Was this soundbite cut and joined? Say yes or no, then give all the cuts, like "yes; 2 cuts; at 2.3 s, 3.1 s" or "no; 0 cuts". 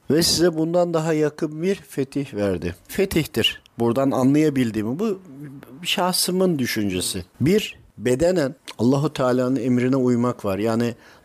yes; 2 cuts; at 2.9 s, 7.3 s